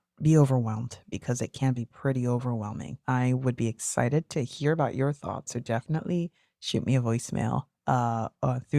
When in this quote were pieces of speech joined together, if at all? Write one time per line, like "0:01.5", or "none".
0:03.0